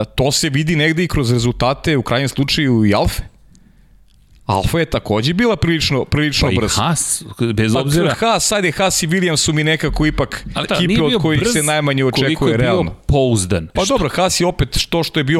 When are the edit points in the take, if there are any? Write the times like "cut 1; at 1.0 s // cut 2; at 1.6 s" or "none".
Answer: cut 1; at 10.7 s // cut 2; at 13.8 s